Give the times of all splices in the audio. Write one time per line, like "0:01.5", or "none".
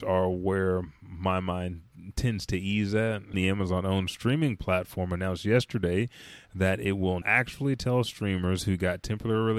0:03.3
0:07.2